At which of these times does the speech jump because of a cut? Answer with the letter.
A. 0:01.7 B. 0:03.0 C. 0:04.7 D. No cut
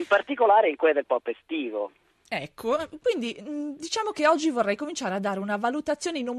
D